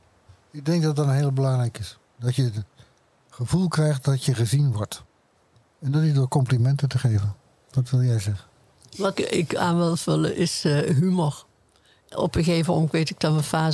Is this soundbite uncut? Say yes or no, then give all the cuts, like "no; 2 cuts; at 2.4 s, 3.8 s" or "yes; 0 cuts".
no; 1 cut; at 9.1 s